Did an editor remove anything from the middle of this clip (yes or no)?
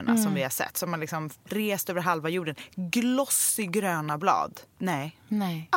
yes